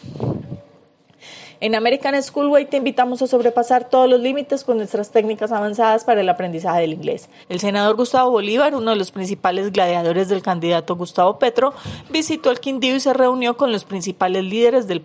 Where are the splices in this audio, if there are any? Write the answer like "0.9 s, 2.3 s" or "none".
7.4 s